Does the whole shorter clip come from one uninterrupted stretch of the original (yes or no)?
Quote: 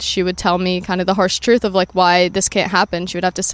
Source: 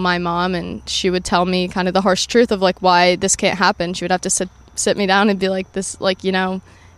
yes